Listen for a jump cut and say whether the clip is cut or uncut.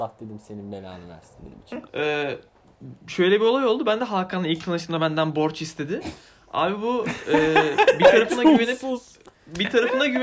cut